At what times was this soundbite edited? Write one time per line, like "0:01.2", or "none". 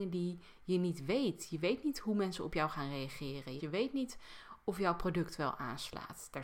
0:03.6

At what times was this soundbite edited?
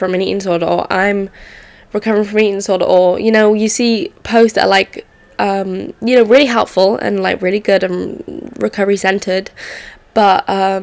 none

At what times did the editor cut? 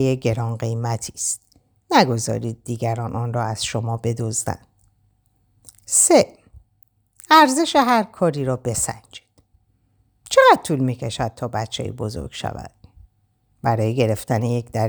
none

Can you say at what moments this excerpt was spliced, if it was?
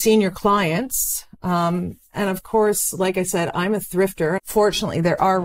0:04.4

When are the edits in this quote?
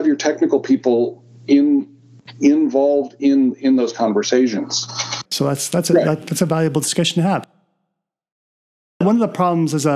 0:05.3

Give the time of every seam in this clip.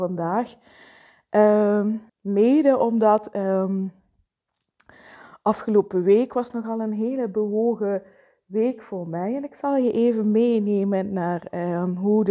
0:02.1

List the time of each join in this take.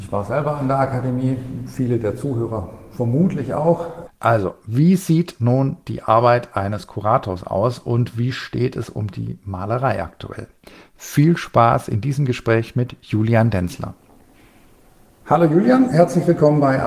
0:04.1

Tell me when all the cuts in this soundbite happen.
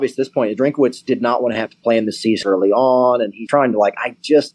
0:02.4
0:03.5

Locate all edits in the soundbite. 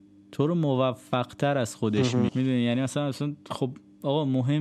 0:02.3

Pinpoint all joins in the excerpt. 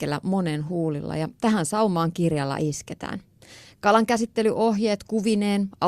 none

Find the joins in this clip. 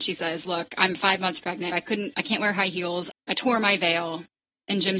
0:01.7
0:03.1

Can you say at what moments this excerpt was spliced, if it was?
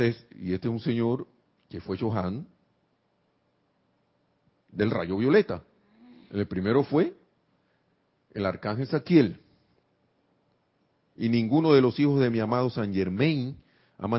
0:11.1

